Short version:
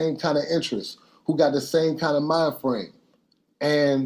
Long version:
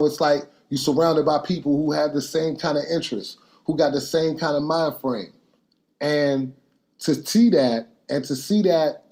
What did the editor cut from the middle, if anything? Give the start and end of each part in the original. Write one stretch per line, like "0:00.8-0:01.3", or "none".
none